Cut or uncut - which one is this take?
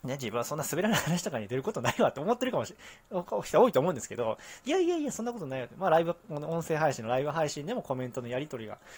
uncut